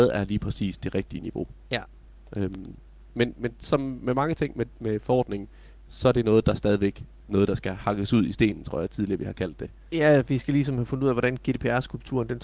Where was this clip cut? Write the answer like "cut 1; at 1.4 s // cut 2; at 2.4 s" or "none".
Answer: cut 1; at 7.2 s